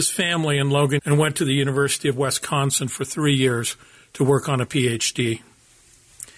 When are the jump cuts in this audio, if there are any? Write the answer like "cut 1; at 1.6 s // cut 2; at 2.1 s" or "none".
cut 1; at 1.0 s